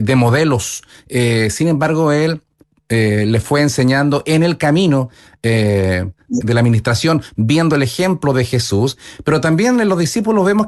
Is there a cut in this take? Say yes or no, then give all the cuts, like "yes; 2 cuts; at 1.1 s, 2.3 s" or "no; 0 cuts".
yes; 2 cuts; at 0.9 s, 6.4 s